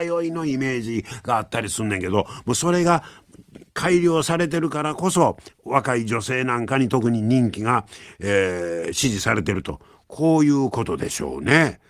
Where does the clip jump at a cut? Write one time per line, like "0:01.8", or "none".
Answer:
none